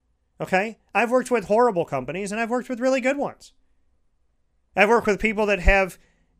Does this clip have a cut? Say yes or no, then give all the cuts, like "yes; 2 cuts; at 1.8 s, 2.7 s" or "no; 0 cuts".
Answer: no; 0 cuts